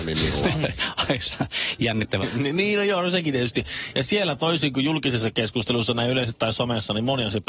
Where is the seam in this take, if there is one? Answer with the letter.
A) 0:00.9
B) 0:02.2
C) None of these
B